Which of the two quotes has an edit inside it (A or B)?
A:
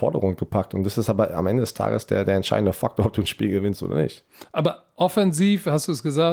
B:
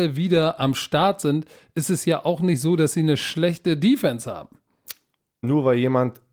B